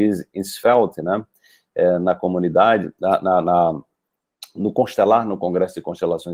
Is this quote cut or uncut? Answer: uncut